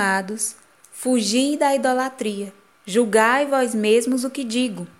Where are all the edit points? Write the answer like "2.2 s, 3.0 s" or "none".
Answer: 2.7 s